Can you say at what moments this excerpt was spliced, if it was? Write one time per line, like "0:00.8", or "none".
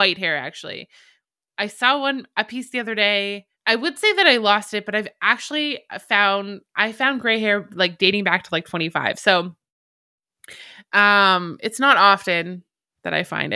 0:03.5